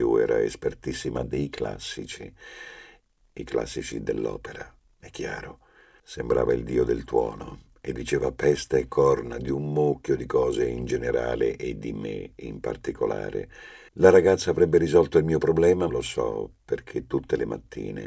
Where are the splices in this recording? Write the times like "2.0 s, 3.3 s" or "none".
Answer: 6.0 s, 13.9 s, 15.9 s